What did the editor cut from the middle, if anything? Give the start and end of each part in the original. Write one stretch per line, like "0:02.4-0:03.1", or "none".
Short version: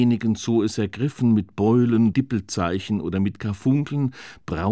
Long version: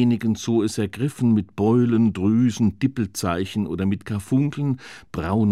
0:02.1-0:02.8